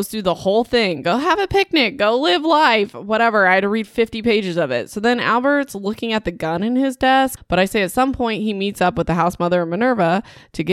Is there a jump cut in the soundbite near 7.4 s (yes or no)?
yes